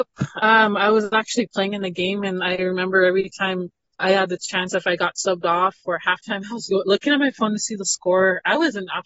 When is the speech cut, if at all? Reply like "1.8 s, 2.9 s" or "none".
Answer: none